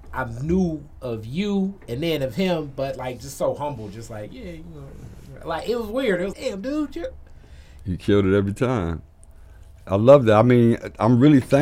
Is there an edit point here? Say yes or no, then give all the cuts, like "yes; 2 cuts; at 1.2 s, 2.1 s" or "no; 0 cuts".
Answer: yes; 2 cuts; at 6.3 s, 7.8 s